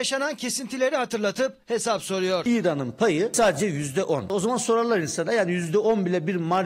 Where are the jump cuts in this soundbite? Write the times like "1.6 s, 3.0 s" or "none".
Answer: none